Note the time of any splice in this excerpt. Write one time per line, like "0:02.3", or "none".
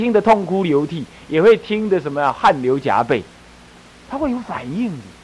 none